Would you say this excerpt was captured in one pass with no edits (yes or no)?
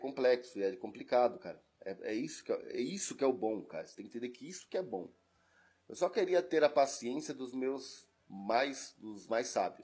yes